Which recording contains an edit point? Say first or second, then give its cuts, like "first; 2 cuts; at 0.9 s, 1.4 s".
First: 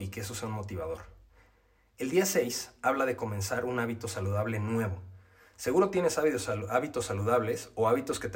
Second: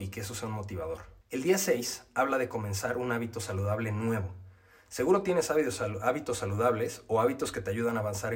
second; 1 cut; at 1.2 s